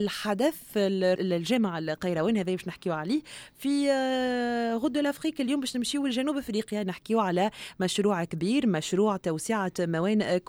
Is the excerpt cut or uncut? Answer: cut